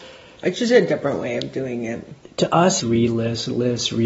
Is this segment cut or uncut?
cut